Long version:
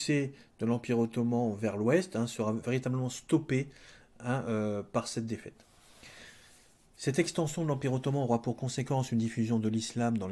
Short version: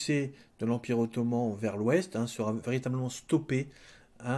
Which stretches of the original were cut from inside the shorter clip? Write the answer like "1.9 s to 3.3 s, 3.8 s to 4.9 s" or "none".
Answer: none